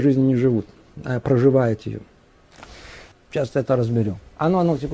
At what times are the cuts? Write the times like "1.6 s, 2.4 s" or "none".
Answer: 3.1 s